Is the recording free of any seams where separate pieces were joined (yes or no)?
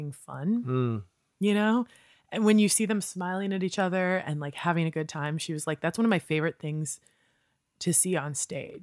yes